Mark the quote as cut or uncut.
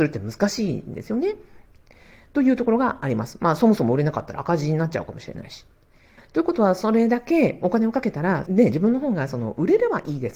cut